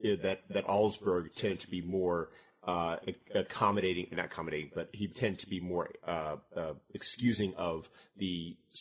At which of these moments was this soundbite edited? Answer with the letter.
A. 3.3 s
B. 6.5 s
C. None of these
C